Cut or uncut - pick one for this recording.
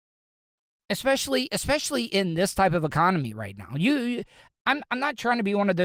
cut